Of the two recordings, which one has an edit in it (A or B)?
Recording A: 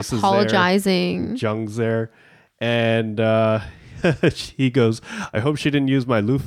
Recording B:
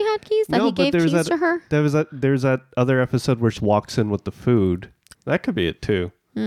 B